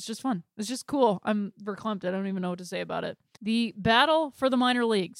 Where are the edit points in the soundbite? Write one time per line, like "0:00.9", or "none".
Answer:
0:03.3